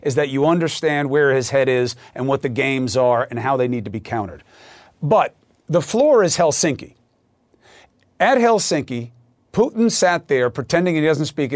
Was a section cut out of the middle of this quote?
no; 0 cuts

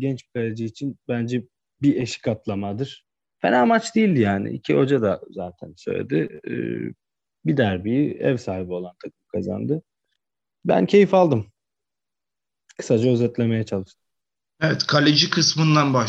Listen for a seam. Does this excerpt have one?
yes; 1 cut; at 3.3 s

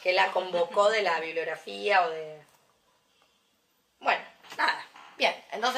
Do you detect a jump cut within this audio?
no; 0 cuts

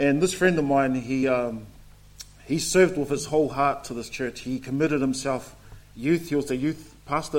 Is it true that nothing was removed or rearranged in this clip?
yes; 0 cuts

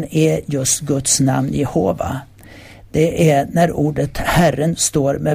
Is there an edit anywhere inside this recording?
no; 0 cuts

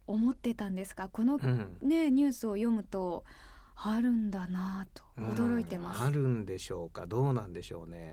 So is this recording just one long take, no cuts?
yes; 0 cuts

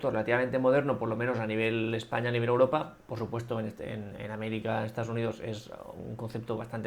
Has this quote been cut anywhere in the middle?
no; 0 cuts

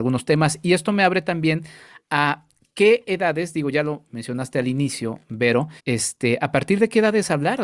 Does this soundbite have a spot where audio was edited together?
yes; 1 cut; at 5.8 s

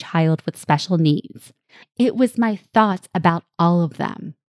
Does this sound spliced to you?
yes; 1 cut; at 1.8 s

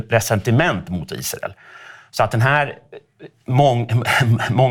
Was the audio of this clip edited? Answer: no; 0 cuts

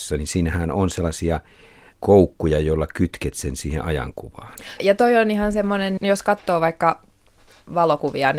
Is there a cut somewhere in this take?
yes; 2 cuts; at 4.8 s, 6.0 s

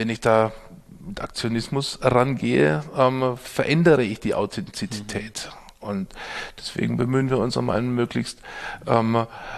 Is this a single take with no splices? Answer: yes; 0 cuts

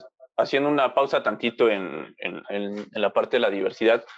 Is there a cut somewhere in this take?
yes; 1 cut; at 2.4 s

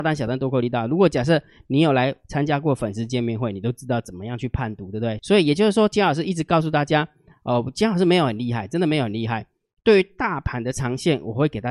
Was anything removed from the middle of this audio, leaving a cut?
yes; 1 cut; at 5.2 s

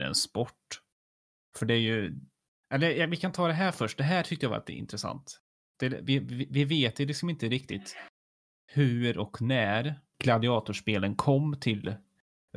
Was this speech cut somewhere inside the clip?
no; 0 cuts

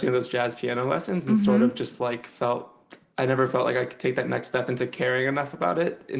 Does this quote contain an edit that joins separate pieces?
no; 0 cuts

